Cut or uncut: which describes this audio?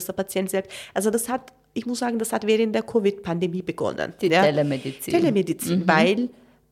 uncut